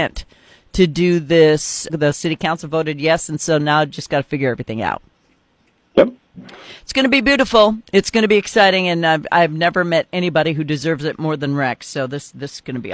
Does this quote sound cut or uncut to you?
cut